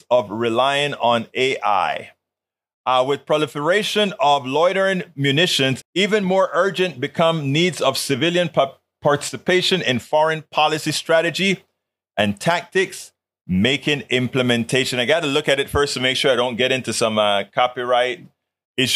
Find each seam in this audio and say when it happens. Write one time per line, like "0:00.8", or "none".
0:05.8